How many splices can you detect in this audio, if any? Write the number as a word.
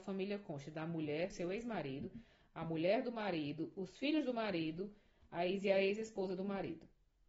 one